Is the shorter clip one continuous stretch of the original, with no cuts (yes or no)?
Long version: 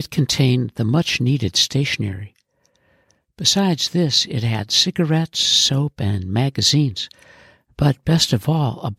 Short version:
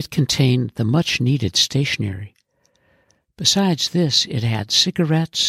yes